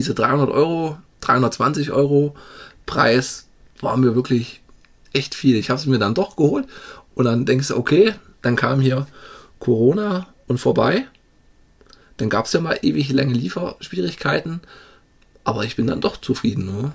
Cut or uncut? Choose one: uncut